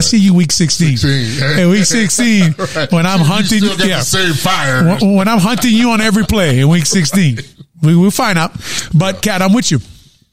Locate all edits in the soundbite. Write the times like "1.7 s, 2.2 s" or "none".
9.2 s